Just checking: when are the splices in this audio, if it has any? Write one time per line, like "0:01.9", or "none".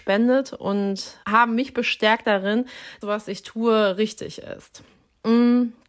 0:01.2
0:03.0